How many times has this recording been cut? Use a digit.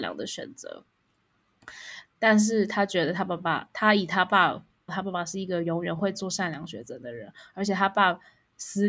2